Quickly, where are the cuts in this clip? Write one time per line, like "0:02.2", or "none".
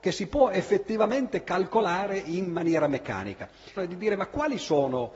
0:03.8